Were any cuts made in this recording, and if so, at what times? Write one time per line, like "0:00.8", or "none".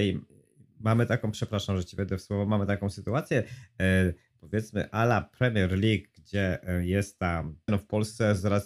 0:07.7